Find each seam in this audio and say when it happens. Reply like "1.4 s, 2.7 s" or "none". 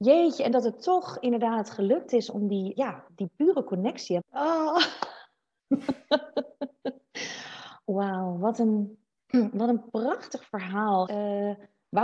2.8 s, 4.2 s, 11.1 s